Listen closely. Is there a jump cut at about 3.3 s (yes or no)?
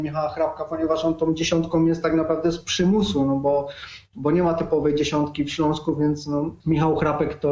no